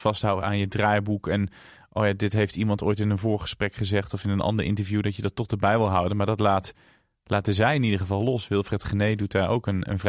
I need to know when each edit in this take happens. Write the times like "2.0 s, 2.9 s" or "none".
none